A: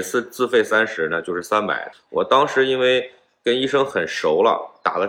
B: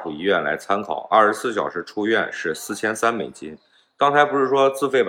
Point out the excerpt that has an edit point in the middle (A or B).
A